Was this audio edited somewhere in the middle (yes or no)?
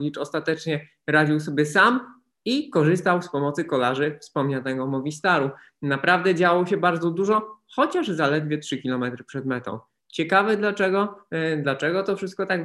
no